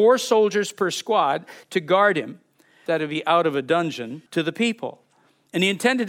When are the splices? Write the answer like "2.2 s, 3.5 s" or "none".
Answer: 2.9 s, 4.3 s